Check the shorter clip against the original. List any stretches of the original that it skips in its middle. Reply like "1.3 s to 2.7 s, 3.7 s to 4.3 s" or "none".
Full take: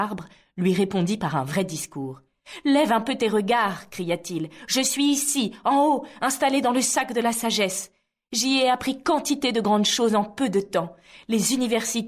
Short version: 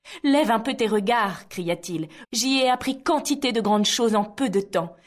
4.7 s to 8.2 s